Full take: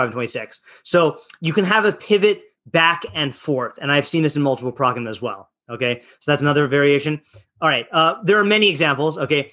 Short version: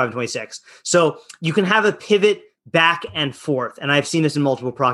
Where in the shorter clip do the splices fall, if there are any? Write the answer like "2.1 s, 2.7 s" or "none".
none